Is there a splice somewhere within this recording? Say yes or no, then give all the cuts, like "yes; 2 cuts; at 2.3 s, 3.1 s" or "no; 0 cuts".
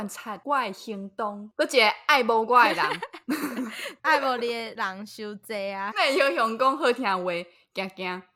yes; 1 cut; at 5.9 s